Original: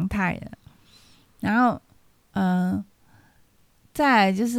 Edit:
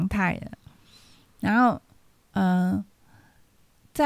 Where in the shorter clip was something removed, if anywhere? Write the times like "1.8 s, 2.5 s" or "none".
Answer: none